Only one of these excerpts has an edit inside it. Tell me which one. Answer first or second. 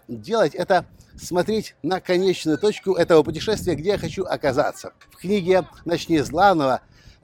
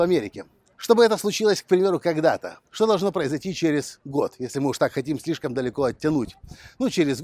first